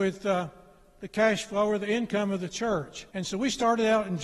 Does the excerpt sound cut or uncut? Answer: cut